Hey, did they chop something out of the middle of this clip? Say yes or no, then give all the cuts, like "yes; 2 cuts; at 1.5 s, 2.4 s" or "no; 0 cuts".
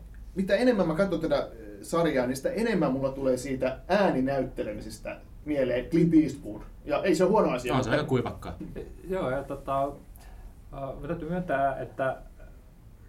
yes; 1 cut; at 8.6 s